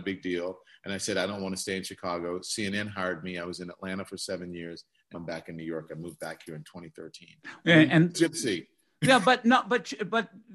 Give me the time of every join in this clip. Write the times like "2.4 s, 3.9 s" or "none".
5.1 s, 8.1 s